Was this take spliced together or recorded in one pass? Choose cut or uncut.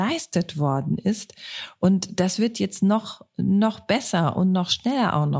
uncut